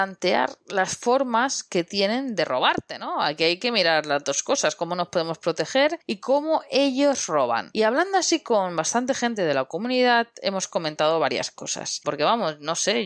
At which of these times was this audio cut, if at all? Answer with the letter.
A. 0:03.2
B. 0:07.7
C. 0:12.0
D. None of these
C